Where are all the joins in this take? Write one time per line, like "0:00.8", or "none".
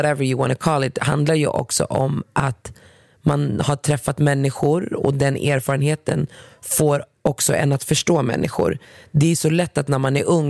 none